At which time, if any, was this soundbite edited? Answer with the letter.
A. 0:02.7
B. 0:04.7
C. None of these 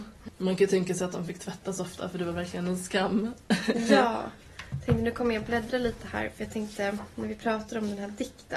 C